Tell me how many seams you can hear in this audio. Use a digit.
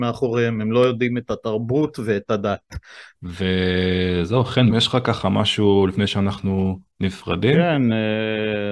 2